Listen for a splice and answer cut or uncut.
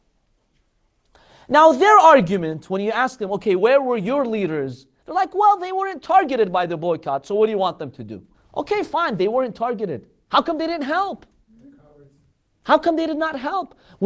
cut